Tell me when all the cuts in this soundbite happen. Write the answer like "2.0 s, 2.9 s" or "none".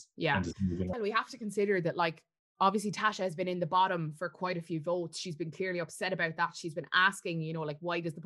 0.9 s